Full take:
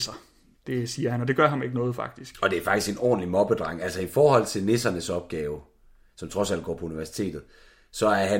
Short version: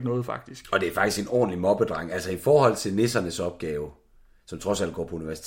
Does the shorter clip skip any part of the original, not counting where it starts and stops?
no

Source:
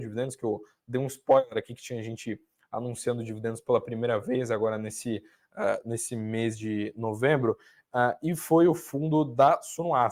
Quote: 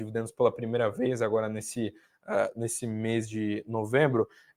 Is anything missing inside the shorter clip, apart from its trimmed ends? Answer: no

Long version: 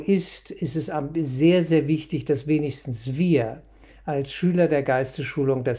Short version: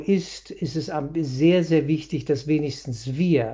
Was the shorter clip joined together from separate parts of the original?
no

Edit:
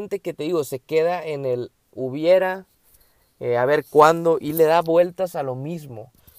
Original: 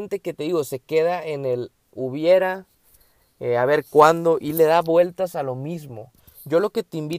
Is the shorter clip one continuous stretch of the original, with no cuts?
yes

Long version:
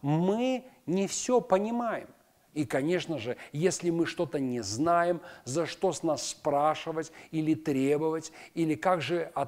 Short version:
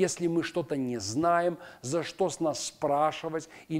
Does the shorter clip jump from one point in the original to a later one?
no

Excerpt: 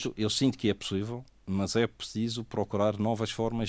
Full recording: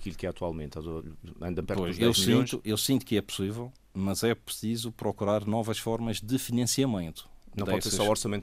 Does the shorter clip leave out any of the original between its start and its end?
no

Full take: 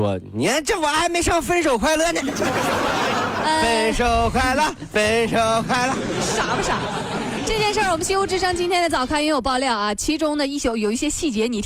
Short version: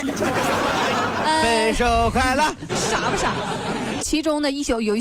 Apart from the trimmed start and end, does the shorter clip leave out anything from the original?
yes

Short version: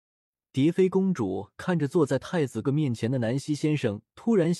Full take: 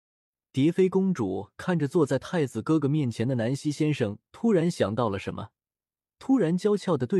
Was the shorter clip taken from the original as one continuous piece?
no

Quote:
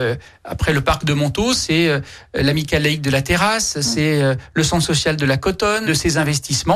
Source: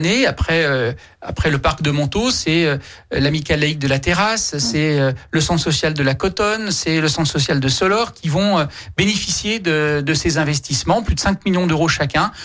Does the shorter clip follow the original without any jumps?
no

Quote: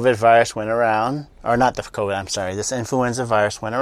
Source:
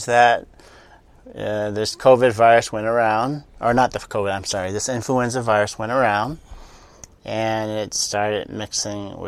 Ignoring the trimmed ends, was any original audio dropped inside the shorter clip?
no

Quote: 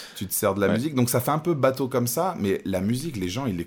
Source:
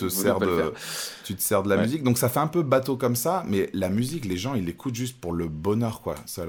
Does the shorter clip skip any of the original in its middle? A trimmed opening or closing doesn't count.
no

